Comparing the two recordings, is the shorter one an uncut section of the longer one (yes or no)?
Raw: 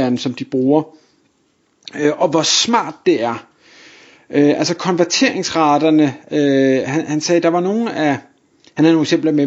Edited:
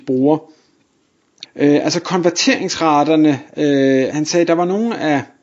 no